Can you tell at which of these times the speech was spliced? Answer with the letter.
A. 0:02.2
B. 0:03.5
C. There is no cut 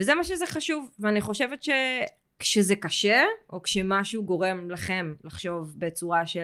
C